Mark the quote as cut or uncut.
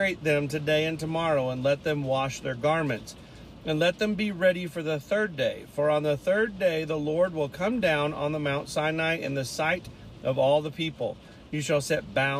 uncut